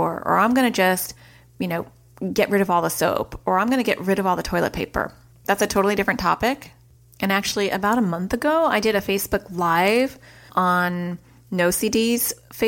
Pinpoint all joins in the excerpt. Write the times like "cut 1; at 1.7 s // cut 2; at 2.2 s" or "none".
cut 1; at 5.3 s